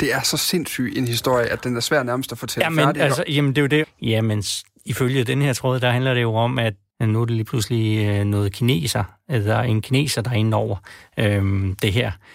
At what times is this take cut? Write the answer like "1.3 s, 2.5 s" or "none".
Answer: 3.8 s, 6.9 s